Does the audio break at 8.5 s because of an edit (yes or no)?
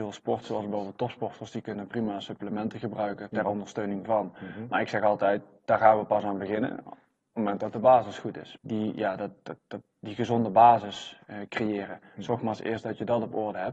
yes